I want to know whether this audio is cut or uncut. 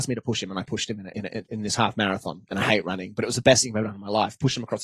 uncut